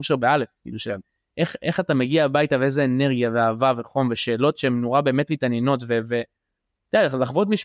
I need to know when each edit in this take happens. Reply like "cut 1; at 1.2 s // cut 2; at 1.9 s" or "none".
none